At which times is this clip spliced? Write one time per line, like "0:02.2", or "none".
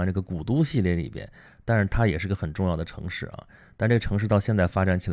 none